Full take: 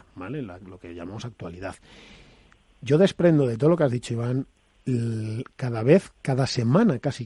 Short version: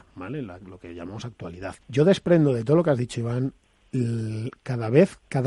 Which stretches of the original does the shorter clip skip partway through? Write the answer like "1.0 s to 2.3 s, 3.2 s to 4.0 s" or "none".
1.8 s to 2.8 s